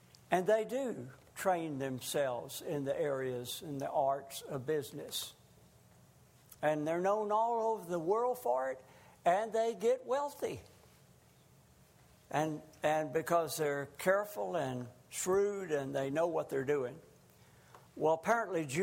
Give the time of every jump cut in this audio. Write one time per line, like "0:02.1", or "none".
0:17.9